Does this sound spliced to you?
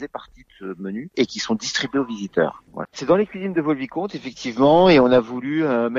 yes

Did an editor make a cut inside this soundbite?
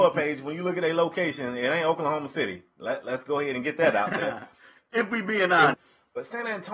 yes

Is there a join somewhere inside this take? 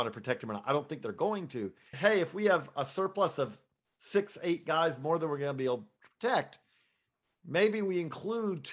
yes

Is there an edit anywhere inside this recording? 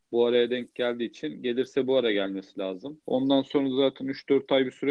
yes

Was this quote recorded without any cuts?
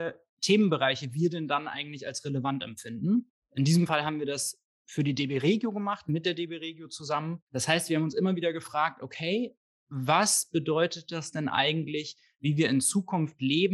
yes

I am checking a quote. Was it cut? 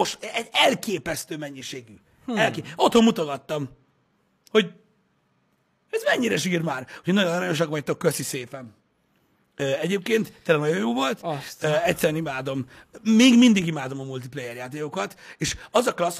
no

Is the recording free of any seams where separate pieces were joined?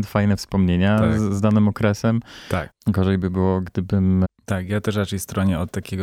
no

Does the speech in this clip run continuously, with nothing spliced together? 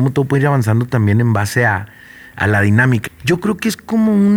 no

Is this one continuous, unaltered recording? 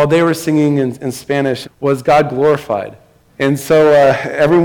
no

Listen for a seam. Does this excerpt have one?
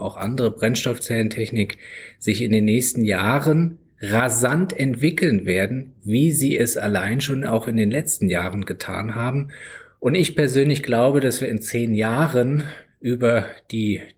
no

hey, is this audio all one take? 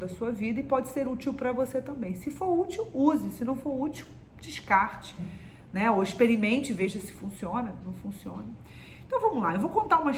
yes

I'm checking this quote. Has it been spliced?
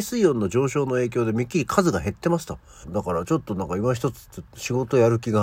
yes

